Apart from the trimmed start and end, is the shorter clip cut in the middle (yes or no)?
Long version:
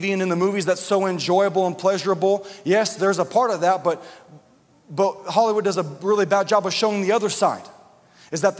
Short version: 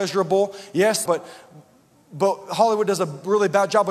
yes